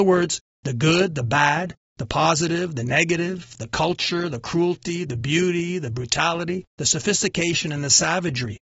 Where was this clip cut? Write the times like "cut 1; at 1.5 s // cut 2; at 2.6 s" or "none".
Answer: none